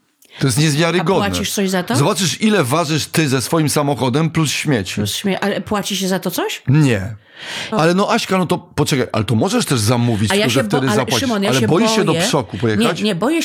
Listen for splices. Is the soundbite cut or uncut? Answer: cut